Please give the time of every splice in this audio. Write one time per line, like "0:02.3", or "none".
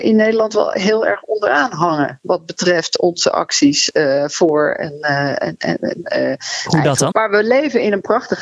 0:06.0
0:07.1